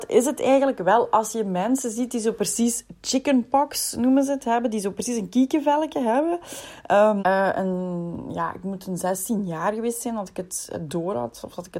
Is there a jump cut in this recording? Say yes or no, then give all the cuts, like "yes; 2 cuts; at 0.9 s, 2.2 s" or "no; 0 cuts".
yes; 1 cut; at 7.2 s